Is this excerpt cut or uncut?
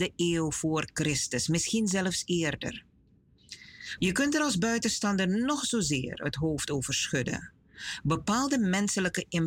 cut